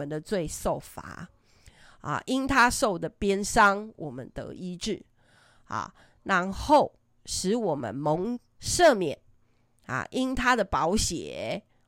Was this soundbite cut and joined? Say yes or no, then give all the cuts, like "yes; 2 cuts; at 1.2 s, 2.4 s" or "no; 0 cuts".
no; 0 cuts